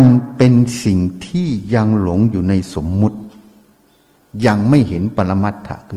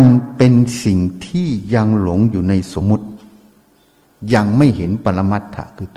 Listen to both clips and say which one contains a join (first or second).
second